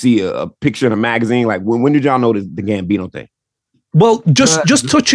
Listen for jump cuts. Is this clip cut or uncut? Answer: uncut